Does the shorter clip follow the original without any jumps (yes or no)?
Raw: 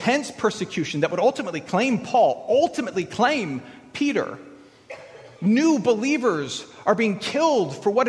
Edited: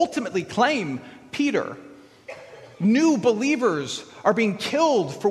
yes